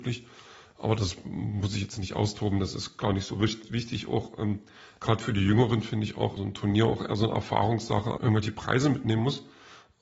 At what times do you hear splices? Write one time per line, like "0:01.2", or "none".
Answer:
0:06.4
0:08.2